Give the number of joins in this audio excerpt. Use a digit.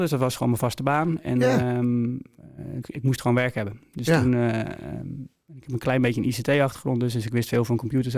1